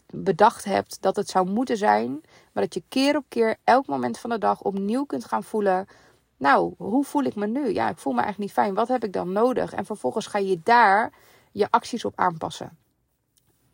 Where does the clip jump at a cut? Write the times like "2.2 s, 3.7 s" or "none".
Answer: none